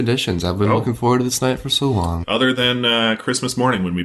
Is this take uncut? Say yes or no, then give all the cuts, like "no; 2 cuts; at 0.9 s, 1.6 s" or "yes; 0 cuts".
no; 1 cut; at 2.2 s